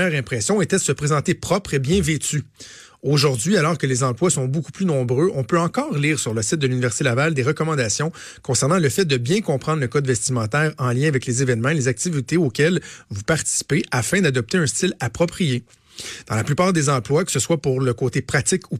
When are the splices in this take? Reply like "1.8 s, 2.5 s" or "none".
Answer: none